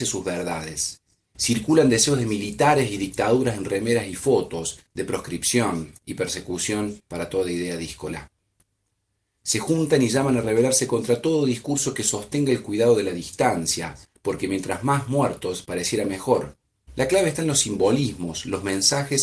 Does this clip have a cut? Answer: yes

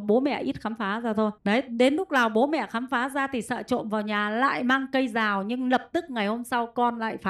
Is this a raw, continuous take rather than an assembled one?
no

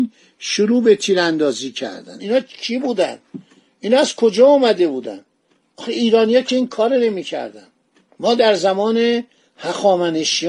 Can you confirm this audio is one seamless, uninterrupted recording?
no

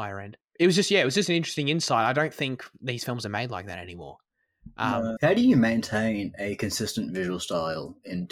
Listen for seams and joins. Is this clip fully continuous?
no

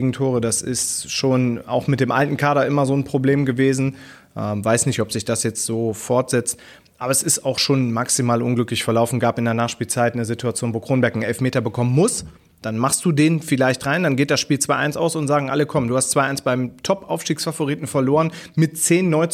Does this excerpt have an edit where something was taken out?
no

